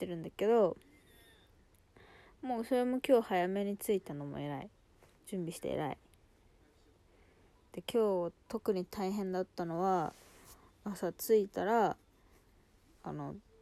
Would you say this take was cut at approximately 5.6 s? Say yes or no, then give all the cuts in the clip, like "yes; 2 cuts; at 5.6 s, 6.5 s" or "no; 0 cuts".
yes; 1 cut; at 5.6 s